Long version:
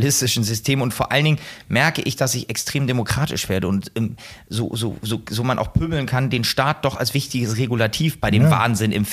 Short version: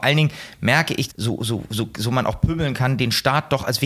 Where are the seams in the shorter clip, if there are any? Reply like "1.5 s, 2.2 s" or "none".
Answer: 1.1 s